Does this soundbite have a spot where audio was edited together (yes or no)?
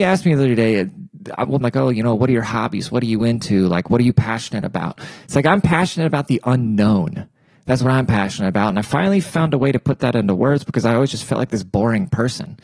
yes